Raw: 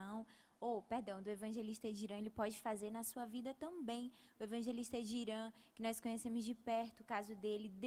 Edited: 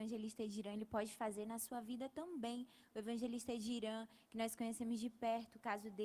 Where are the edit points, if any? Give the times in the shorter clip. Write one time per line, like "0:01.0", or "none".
none